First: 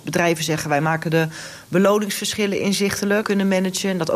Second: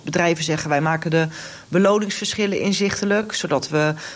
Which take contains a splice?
first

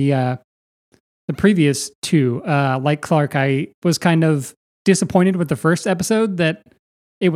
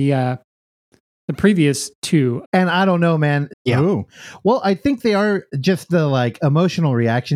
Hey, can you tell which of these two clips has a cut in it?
second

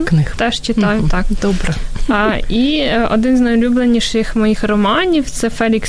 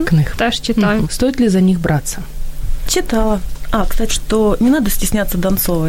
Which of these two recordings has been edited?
second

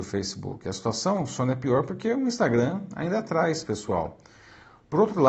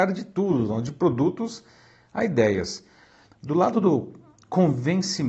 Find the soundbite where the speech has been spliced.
second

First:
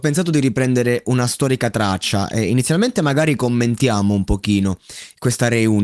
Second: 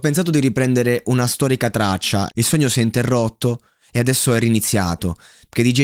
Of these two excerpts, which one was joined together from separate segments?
second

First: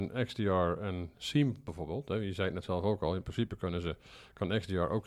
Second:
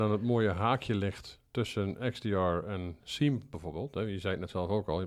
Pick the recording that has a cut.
second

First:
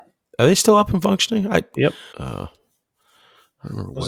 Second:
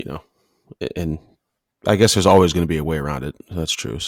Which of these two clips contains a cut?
first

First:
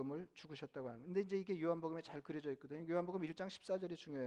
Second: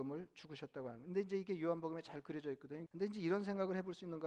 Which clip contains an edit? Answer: second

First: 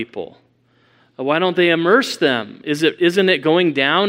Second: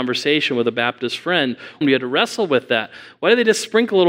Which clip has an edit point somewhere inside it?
second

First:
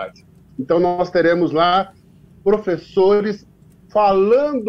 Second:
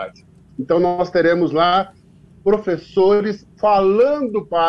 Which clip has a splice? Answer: second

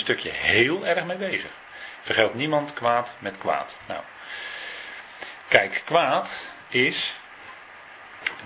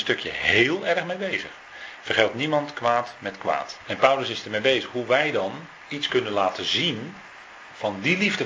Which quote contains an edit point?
second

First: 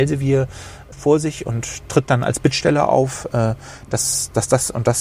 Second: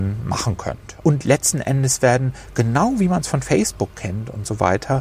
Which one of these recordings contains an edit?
second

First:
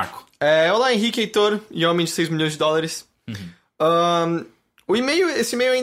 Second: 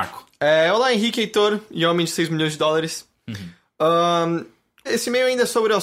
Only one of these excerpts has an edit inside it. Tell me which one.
second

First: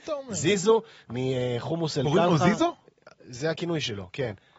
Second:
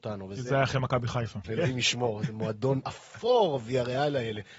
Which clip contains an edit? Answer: second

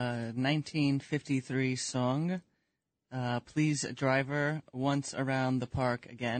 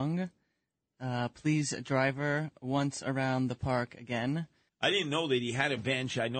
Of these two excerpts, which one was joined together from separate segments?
second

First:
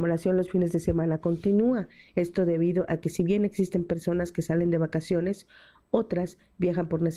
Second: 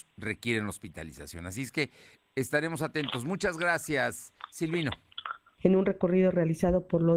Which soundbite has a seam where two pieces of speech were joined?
second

